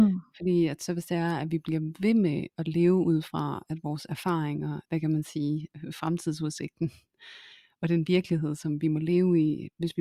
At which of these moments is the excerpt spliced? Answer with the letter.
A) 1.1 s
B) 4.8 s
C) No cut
B